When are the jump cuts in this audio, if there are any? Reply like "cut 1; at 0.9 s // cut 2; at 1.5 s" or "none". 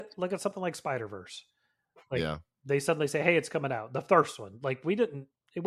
none